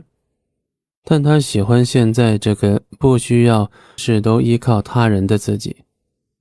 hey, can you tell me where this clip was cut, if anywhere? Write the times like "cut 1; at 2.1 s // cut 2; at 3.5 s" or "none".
cut 1; at 1.0 s // cut 2; at 4.0 s